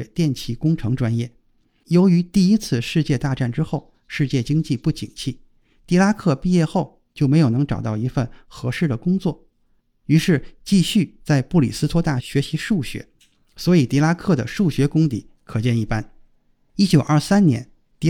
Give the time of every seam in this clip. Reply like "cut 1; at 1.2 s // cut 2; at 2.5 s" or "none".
cut 1; at 12.2 s